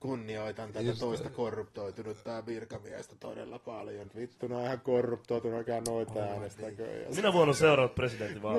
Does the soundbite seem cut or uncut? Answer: cut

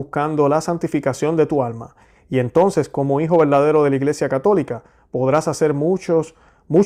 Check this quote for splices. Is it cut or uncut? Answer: uncut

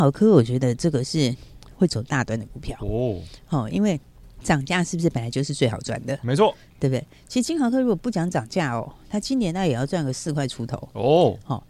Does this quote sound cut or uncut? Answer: uncut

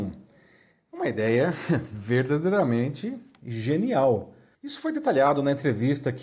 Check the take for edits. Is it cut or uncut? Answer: cut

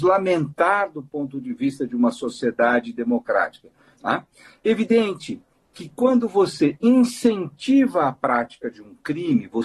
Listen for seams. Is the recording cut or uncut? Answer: cut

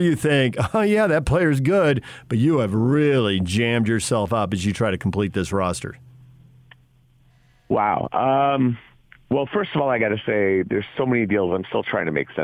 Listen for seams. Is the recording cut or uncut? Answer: uncut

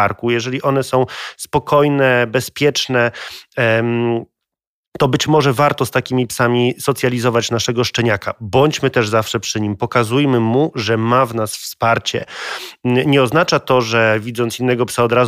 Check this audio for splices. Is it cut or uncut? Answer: uncut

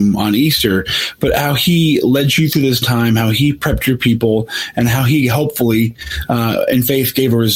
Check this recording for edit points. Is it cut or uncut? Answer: uncut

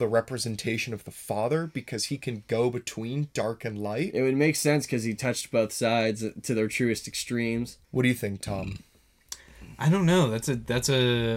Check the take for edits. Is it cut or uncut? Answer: cut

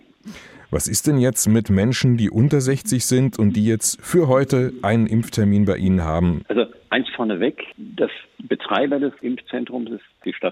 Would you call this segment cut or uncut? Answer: cut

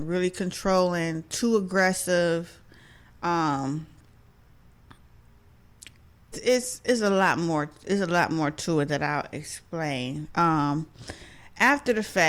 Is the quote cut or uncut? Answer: cut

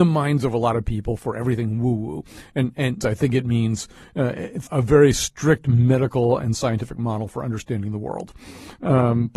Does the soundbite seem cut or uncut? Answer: cut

